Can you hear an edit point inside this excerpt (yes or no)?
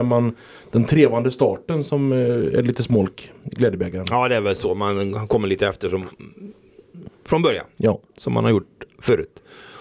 no